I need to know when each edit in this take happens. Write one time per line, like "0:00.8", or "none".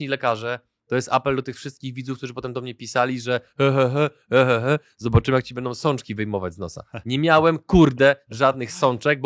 none